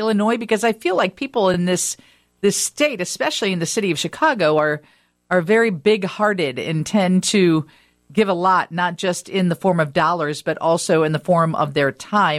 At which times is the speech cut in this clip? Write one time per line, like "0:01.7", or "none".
none